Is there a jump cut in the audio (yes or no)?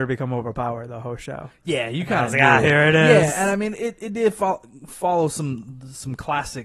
no